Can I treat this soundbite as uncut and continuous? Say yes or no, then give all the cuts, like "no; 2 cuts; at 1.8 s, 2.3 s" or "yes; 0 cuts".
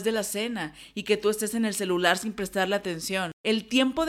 yes; 0 cuts